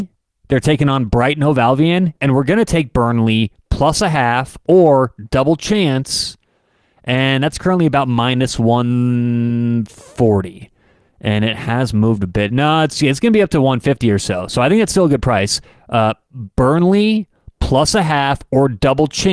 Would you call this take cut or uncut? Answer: uncut